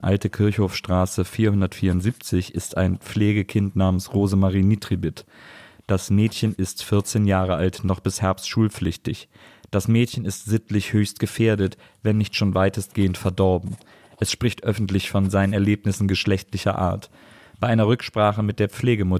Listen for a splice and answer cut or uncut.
uncut